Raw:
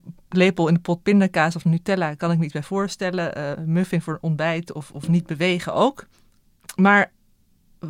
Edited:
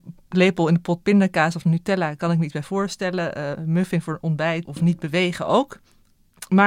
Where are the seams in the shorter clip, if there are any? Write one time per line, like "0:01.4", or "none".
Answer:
0:04.7